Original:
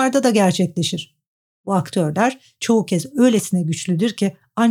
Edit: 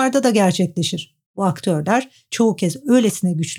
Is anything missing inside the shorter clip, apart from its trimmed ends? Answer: yes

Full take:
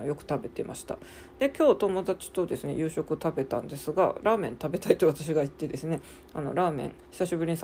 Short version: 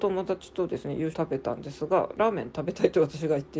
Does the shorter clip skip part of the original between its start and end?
yes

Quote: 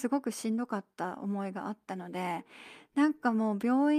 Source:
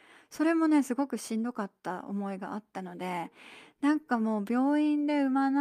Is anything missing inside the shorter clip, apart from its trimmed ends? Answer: no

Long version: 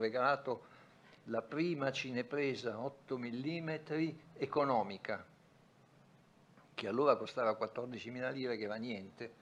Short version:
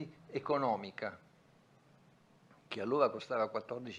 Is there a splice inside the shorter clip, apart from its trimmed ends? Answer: no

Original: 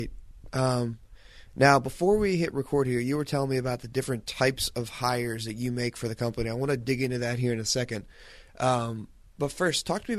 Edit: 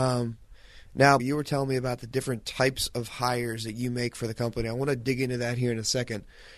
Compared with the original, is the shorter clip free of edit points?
no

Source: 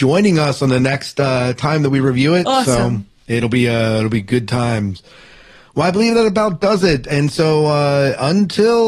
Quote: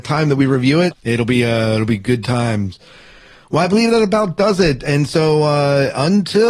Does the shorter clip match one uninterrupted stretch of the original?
no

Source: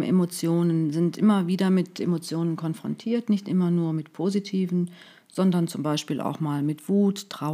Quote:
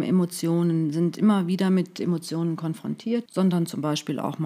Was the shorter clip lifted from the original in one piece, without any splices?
no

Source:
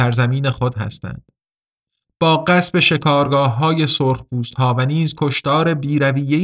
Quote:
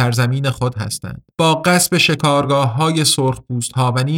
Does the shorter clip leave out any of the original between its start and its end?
yes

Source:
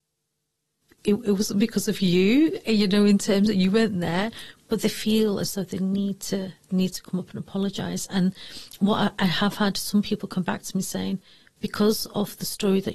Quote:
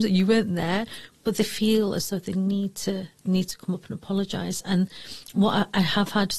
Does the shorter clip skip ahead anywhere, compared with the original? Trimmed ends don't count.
no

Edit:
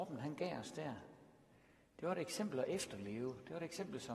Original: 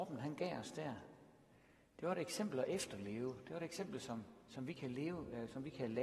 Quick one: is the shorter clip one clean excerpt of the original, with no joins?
yes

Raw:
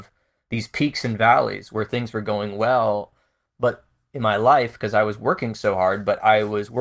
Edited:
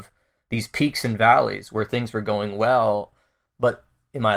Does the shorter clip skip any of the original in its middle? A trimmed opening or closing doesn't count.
no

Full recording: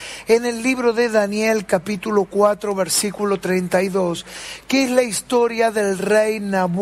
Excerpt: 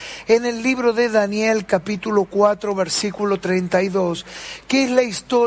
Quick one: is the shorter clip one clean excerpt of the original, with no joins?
yes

